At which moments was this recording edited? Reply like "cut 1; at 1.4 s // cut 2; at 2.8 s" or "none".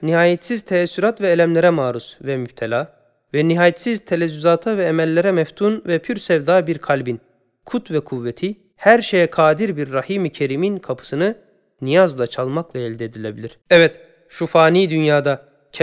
cut 1; at 8.7 s // cut 2; at 13.6 s